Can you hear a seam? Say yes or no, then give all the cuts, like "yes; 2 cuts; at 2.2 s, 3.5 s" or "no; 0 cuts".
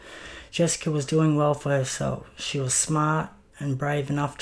no; 0 cuts